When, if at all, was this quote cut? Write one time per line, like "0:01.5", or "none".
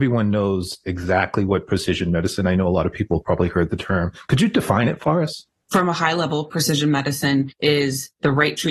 none